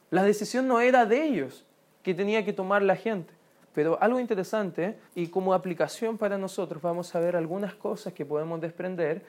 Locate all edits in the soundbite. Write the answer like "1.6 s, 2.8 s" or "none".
3.6 s, 5.1 s